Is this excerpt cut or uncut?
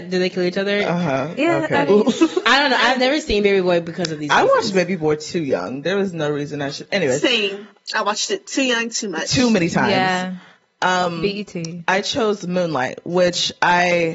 uncut